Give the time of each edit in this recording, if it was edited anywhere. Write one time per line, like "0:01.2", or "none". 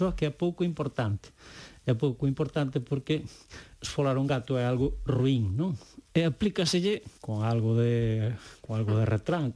0:06.1
0:07.2